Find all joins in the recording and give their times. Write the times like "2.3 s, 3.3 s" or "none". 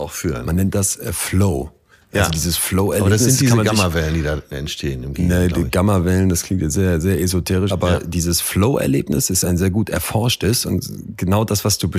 7.7 s